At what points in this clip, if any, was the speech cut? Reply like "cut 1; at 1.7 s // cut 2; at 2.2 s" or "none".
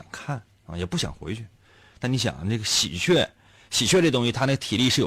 none